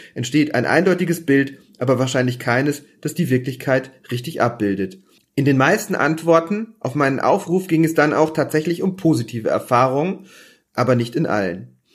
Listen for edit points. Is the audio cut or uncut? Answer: uncut